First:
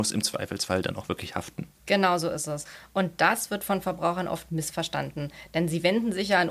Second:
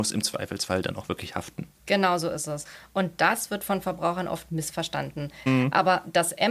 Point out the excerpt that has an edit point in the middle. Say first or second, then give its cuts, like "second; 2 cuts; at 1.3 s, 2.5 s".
second; 1 cut; at 5.5 s